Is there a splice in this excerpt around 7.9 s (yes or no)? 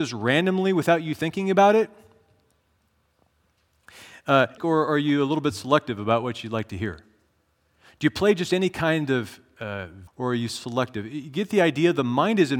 no